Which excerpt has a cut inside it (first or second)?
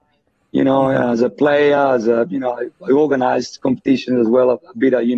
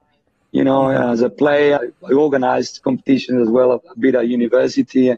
second